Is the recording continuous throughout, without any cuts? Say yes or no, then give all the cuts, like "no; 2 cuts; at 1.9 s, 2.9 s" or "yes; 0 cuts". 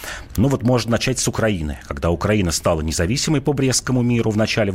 yes; 0 cuts